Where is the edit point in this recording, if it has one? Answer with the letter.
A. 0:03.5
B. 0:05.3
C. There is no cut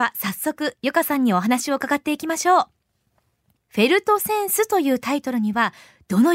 C